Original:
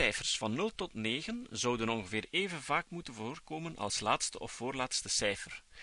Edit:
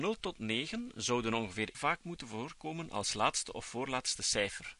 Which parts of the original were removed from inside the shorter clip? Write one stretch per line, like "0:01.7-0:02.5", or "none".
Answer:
0:02.3-0:02.6